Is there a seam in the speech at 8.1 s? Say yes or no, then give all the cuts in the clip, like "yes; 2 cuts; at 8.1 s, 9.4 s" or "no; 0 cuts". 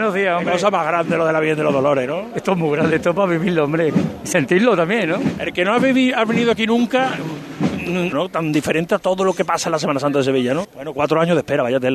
yes; 2 cuts; at 8.1 s, 10.6 s